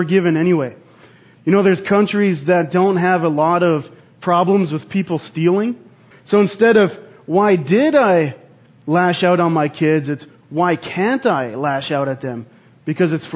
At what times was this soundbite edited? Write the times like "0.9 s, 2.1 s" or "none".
6.1 s